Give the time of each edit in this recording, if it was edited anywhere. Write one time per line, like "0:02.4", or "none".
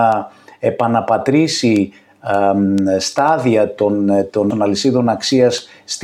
0:04.5

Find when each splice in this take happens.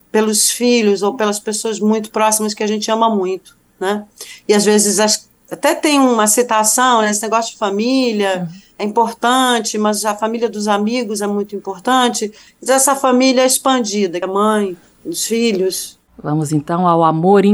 0:14.2

